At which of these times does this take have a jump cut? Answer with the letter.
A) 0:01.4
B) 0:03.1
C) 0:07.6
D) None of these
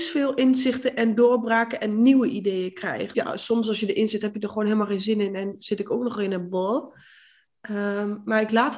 B